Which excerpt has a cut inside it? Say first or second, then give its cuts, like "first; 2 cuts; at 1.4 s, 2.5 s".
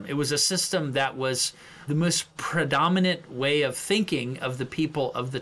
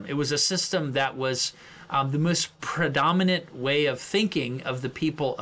first; 1 cut; at 1.9 s